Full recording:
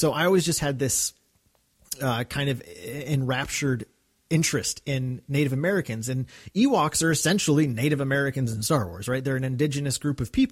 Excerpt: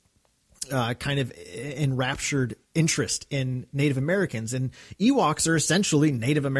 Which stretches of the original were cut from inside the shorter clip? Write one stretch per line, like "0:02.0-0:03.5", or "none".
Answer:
0:03.9-0:04.2